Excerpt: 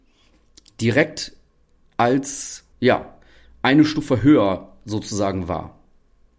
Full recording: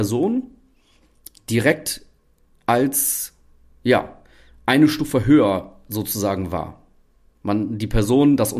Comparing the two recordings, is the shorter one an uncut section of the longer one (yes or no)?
no